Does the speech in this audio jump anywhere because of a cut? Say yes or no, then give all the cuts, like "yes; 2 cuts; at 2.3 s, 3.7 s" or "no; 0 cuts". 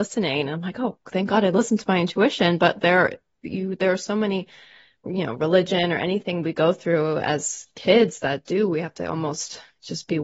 no; 0 cuts